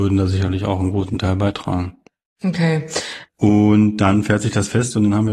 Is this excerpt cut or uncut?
cut